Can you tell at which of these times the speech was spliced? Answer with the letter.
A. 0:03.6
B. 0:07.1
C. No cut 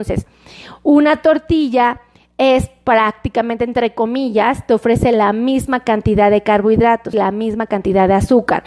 B